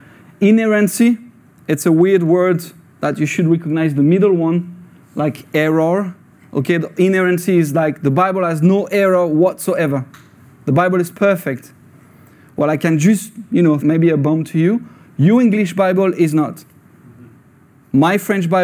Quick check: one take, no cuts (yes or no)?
no